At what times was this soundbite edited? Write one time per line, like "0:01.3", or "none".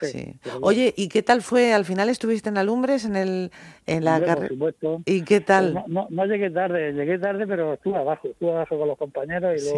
none